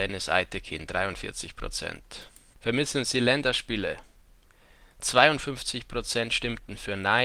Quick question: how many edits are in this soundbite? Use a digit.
1